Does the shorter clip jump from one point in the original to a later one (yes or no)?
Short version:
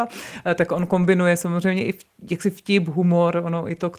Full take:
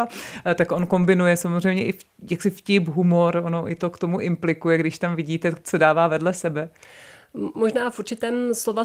no